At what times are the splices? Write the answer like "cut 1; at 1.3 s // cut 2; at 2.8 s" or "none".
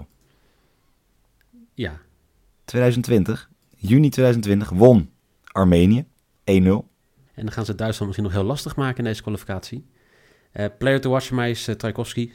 cut 1; at 2.5 s // cut 2; at 7.3 s